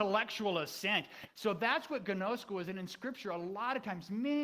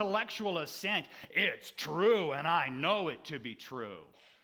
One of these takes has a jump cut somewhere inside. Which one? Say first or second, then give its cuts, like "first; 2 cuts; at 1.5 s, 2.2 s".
first; 1 cut; at 1.3 s